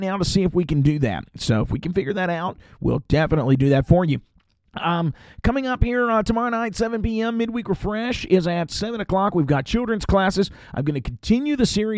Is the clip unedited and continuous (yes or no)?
yes